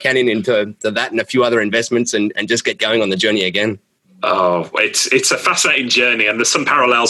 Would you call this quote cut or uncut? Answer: uncut